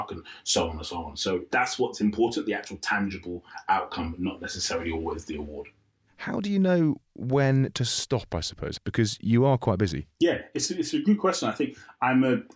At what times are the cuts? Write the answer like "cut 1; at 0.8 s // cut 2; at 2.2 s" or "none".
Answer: cut 1; at 8.8 s